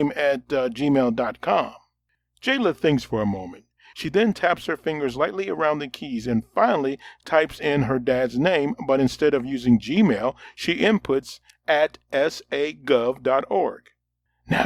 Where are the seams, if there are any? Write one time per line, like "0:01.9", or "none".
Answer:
0:03.9